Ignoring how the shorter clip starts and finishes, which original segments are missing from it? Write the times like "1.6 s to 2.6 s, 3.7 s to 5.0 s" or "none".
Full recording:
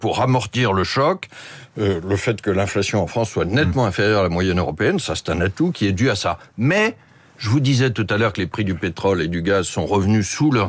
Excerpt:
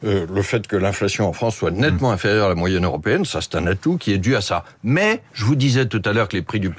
7.0 s to 7.3 s